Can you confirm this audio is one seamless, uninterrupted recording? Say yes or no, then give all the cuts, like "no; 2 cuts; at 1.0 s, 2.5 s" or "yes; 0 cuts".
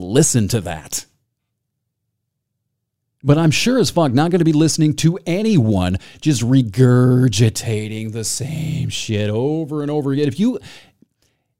yes; 0 cuts